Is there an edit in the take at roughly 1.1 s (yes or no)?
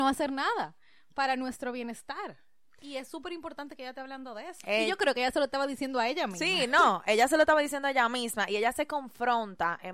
no